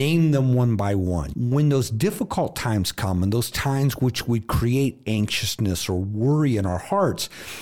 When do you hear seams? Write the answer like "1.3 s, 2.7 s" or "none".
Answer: 1.3 s